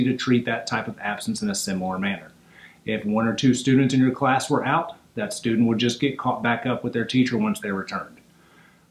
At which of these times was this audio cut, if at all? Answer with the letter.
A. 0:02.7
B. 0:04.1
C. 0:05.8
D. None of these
D